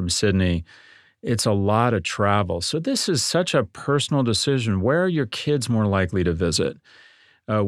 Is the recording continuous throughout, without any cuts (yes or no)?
yes